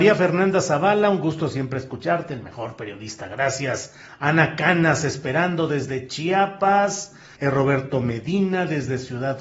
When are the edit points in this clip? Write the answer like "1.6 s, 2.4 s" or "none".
7.3 s